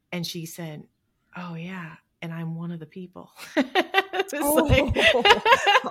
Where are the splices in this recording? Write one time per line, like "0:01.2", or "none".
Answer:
none